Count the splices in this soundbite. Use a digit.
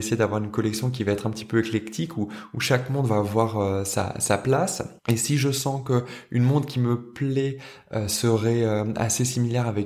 1